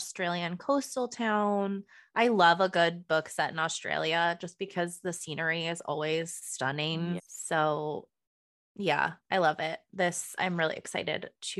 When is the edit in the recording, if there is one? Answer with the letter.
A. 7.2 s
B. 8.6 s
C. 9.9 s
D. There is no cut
A